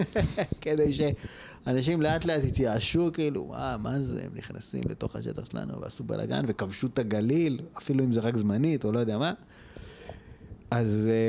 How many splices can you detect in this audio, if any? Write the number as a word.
zero